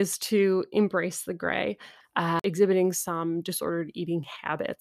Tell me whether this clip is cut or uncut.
cut